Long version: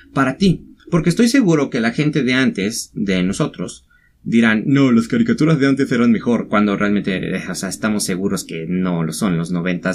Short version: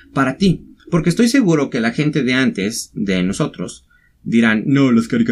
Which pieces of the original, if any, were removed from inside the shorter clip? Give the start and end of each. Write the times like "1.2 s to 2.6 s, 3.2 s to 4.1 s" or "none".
none